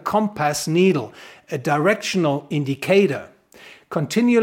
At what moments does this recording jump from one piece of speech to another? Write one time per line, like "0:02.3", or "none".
none